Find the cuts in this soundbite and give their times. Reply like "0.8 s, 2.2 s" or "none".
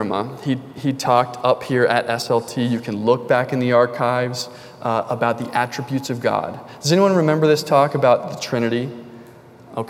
none